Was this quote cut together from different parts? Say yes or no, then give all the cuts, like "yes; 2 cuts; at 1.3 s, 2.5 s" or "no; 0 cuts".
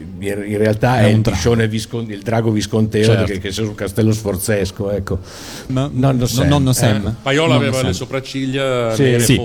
yes; 1 cut; at 5.7 s